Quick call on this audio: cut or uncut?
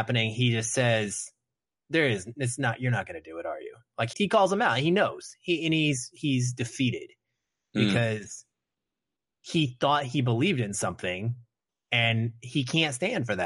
cut